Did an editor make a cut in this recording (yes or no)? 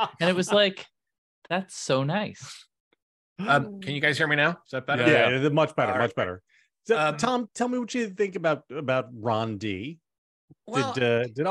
no